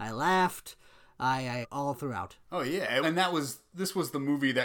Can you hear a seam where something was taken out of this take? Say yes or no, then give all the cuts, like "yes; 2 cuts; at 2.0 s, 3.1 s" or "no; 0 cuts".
yes; 2 cuts; at 1.6 s, 3.0 s